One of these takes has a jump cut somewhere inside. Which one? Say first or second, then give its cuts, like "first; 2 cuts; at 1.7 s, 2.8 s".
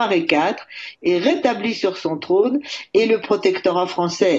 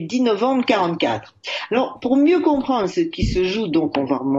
first; 1 cut; at 0.9 s